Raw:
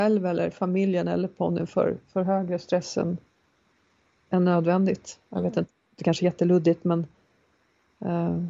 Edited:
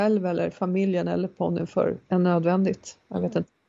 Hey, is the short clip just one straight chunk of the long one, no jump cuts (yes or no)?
no